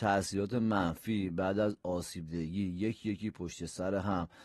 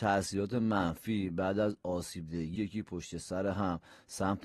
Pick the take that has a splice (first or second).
second